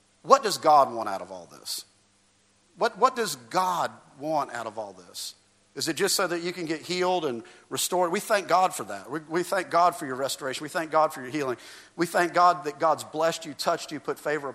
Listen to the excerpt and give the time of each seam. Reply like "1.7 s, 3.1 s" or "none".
none